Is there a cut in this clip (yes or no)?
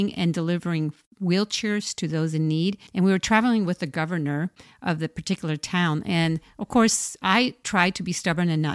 yes